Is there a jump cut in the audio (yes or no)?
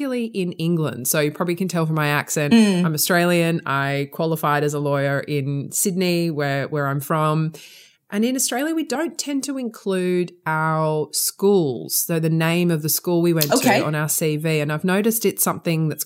no